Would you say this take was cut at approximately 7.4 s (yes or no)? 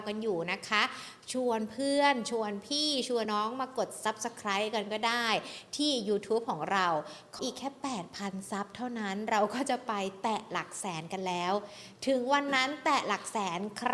yes